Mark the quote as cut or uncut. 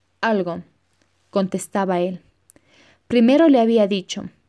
uncut